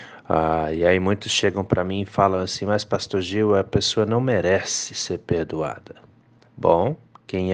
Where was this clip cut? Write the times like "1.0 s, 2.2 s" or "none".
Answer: none